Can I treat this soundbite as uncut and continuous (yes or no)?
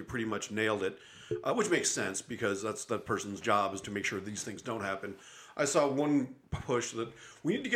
yes